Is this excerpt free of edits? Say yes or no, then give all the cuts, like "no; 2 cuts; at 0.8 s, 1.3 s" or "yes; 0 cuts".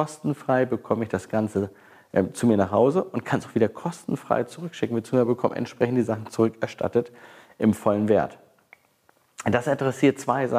yes; 0 cuts